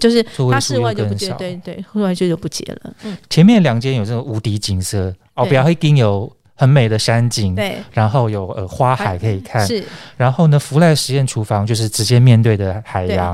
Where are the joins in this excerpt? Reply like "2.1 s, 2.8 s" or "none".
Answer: none

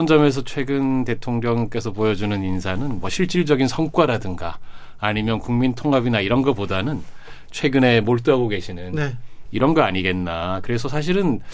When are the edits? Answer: 9.5 s

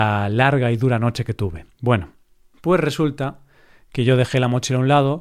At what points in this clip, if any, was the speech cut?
none

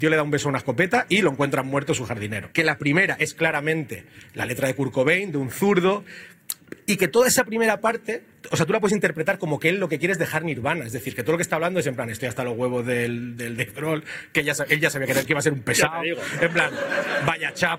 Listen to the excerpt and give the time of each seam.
2.5 s

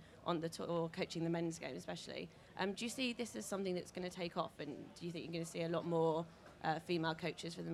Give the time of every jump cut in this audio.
none

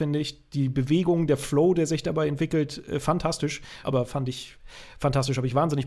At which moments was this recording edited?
3.8 s

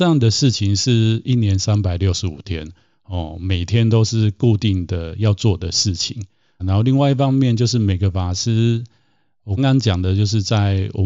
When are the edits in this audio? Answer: 6.6 s, 9.6 s

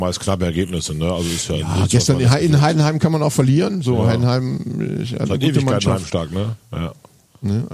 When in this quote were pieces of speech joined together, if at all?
none

